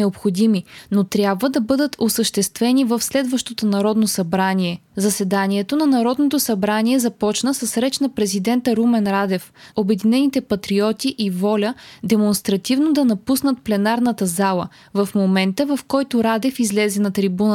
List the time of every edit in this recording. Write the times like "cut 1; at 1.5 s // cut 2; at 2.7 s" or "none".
cut 1; at 4.9 s // cut 2; at 9.7 s